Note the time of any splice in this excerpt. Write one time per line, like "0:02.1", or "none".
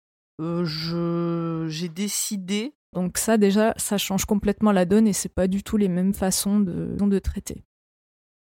0:02.9
0:07.0